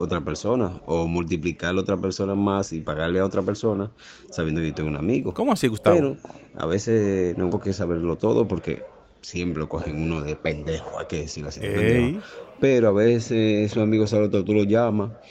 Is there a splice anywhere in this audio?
yes; 1 cut; at 7.5 s

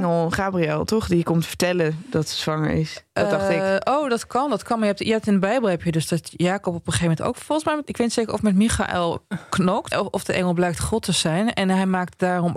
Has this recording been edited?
yes; 1 cut; at 9.9 s

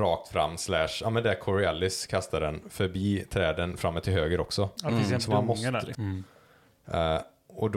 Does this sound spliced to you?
yes; 1 cut; at 5.9 s

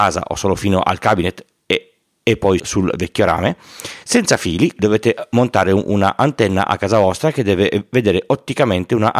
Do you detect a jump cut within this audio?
yes; 2 cuts; at 2.6 s, 4.8 s

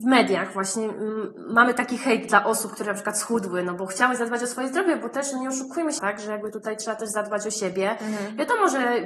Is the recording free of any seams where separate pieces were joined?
no; 1 cut; at 6.0 s

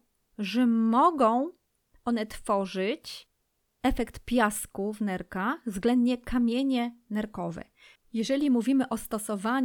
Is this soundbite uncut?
no; 1 cut; at 8.0 s

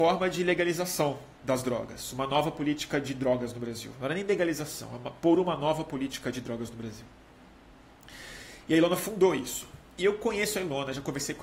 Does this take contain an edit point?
no; 0 cuts

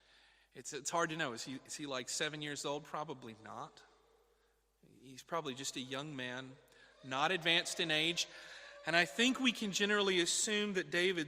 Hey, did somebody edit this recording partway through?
no; 0 cuts

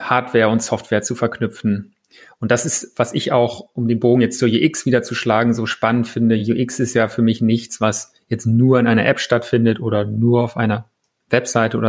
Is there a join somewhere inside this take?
no; 0 cuts

